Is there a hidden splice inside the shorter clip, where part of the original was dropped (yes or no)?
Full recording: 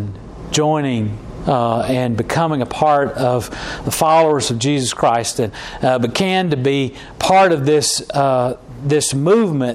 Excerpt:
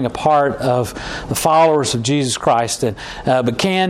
no